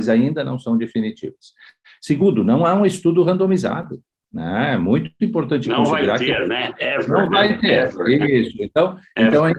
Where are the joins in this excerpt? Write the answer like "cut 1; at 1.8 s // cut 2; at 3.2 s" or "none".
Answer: none